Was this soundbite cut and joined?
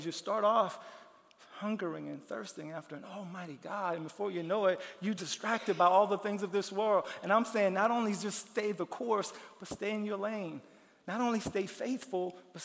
yes; 1 cut; at 5.2 s

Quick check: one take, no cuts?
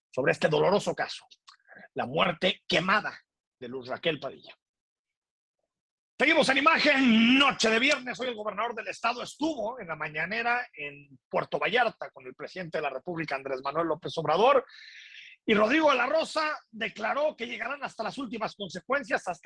yes; 0 cuts

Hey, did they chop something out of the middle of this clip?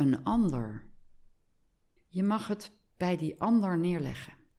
yes; 1 cut; at 2.0 s

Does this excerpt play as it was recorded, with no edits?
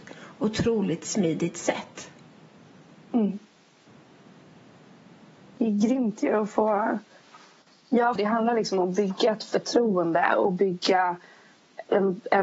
no; 1 cut; at 8.2 s

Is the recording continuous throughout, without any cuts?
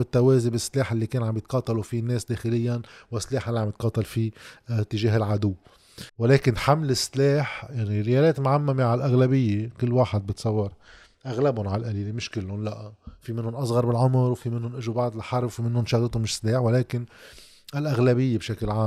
no; 1 cut; at 6.1 s

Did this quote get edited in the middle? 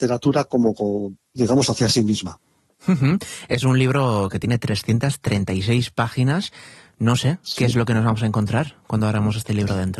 no; 0 cuts

